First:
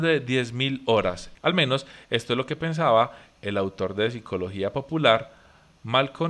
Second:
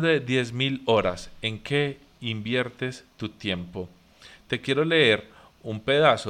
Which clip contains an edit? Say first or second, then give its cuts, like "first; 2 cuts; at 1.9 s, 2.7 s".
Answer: first; 1 cut; at 1.3 s